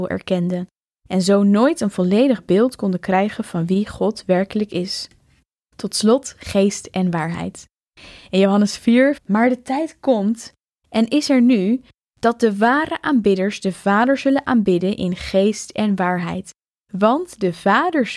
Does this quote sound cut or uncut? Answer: cut